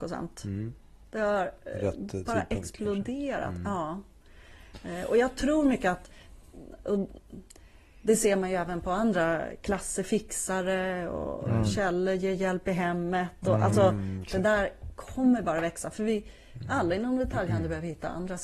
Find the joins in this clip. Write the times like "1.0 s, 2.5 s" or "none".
none